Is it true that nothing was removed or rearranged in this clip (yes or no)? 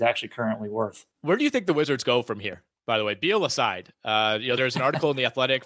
no